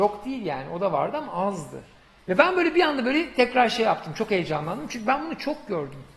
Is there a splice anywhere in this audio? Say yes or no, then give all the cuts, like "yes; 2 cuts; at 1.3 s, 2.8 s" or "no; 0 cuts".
yes; 1 cut; at 2.2 s